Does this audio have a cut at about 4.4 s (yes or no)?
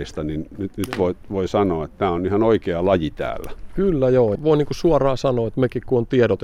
yes